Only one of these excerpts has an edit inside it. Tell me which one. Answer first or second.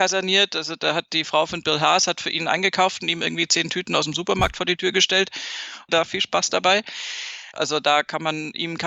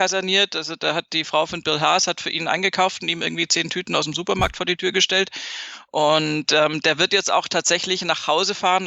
first